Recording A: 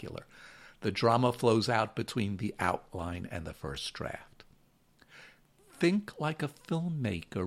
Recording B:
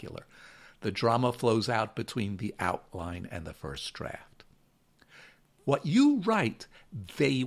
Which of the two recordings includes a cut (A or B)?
B